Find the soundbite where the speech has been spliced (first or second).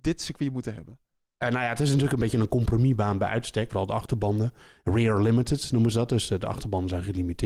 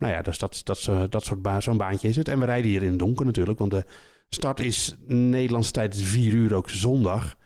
first